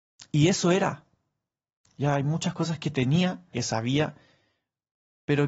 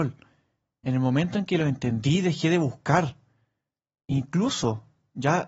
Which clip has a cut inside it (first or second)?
first